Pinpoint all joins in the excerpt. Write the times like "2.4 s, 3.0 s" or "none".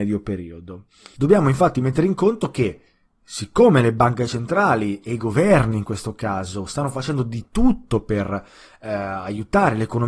1.2 s